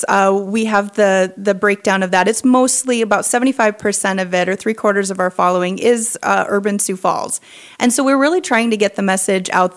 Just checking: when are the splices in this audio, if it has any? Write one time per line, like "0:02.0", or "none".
none